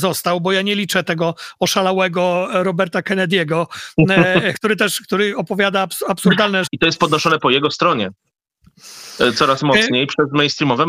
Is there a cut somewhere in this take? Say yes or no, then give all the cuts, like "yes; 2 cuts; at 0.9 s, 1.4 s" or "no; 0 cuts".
yes; 2 cuts; at 4.5 s, 6.7 s